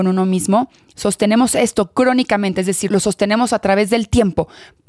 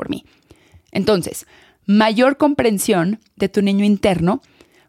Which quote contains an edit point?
first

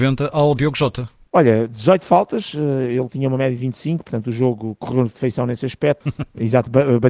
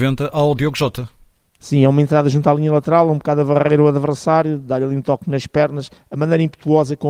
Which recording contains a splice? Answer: first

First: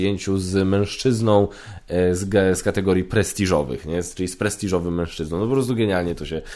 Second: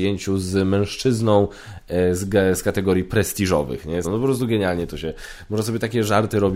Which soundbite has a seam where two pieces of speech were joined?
second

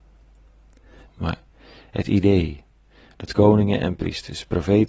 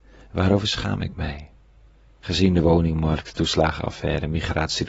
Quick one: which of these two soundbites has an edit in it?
first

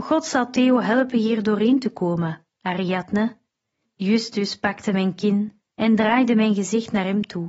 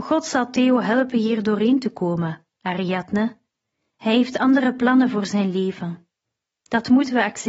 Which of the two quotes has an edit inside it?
first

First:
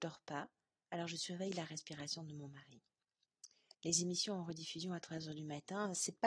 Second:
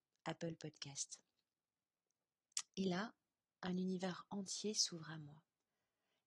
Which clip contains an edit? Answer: first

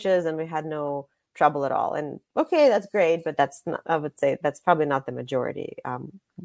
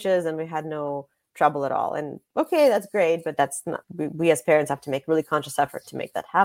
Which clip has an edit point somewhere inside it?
second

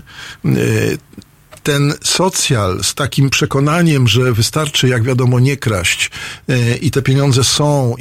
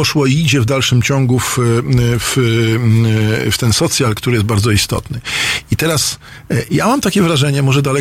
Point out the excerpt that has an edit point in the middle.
first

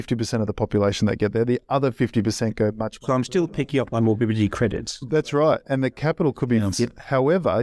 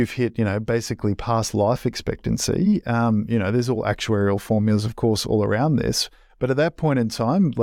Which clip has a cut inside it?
first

